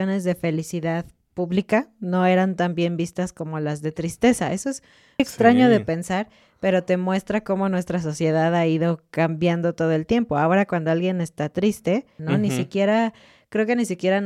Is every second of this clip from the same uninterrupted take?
no; 2 cuts; at 5.2 s, 12.2 s

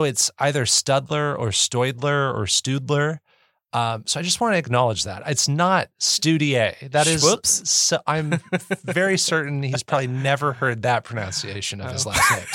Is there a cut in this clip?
no; 0 cuts

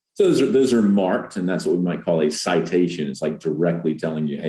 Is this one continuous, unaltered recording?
yes; 0 cuts

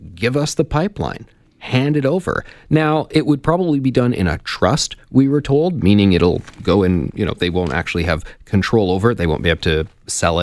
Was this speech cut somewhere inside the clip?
no; 0 cuts

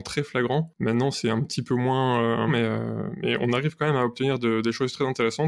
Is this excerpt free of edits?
no; 1 cut; at 2.5 s

